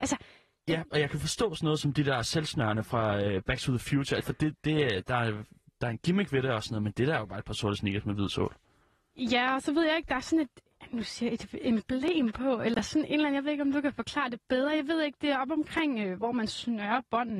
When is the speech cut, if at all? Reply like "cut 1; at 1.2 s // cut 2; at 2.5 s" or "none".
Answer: cut 1; at 4.2 s